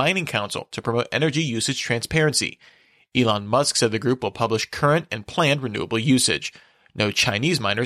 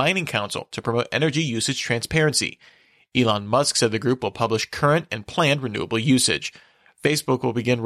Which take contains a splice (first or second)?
second